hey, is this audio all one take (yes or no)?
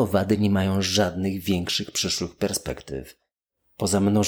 yes